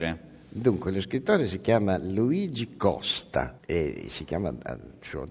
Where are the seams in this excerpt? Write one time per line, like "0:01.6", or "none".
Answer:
none